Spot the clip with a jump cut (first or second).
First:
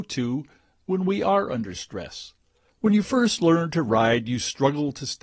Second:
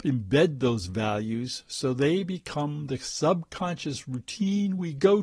first